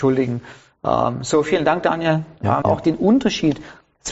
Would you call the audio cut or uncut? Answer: cut